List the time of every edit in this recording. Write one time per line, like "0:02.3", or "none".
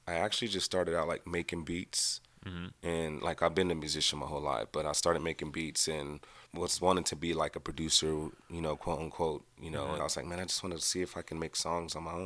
0:06.5
0:10.0